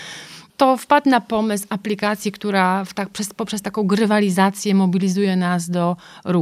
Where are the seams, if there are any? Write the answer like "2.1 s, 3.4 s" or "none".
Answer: none